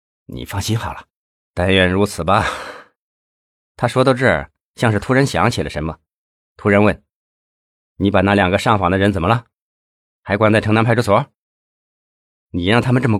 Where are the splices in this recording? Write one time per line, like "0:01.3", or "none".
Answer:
0:01.3